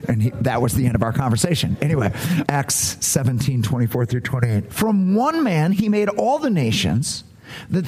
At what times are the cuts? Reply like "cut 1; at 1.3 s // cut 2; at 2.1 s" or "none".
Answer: cut 1; at 2.4 s // cut 2; at 4.7 s